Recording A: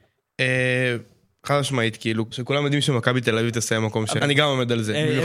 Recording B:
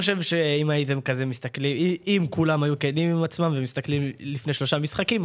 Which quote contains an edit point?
A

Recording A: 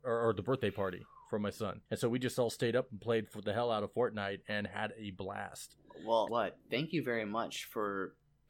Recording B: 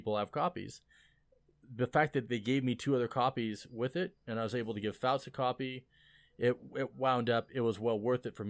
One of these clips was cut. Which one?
A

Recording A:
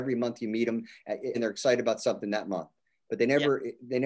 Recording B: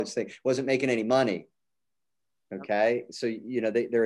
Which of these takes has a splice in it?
A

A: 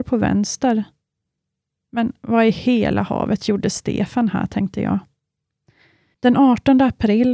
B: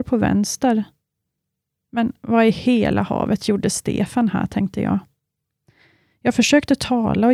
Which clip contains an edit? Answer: A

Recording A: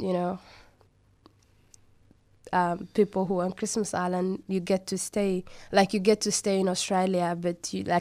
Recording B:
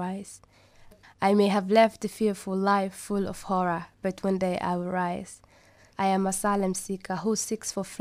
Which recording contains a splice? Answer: B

